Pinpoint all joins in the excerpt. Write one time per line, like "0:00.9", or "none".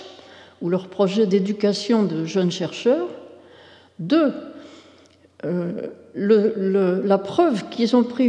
none